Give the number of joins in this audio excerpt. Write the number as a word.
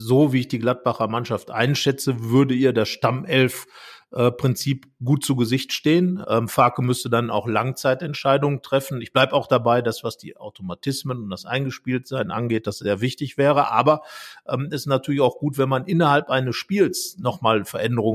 one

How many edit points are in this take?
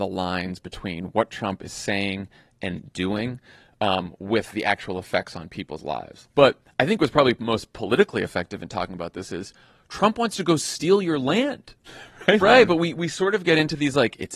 two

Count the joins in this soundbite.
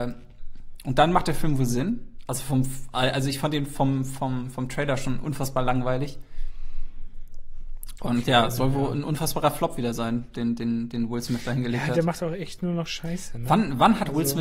one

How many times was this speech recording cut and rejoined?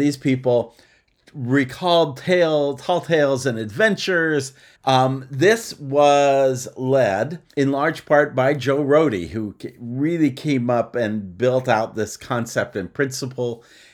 two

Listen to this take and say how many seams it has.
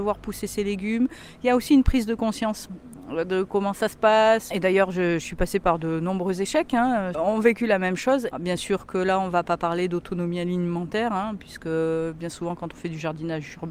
three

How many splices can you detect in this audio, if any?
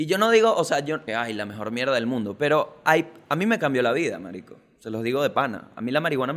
one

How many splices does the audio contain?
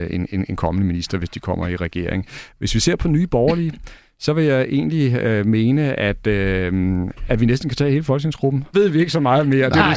one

